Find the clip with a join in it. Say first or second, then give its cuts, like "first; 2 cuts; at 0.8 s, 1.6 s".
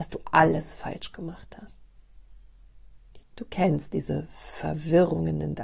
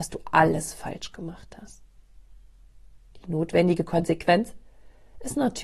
first; 1 cut; at 3.2 s